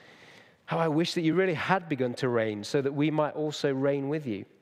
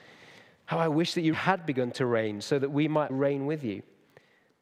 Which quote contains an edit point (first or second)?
second